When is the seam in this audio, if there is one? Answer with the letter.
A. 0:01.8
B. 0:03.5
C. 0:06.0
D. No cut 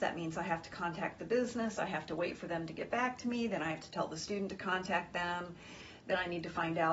D